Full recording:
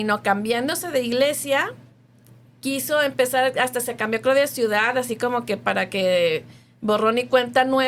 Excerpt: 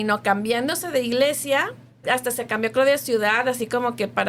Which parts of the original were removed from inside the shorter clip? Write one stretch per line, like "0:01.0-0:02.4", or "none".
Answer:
0:02.0-0:03.5